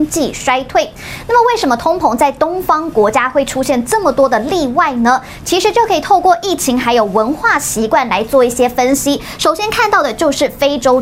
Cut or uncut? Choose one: uncut